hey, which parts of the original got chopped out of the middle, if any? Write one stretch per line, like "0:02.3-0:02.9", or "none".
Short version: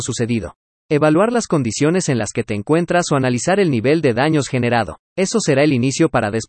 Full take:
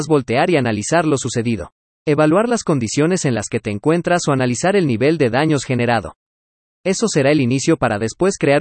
0:06.2-0:06.7